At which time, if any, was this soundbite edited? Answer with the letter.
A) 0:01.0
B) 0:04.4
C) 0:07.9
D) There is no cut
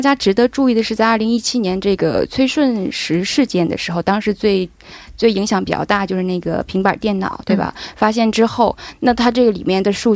D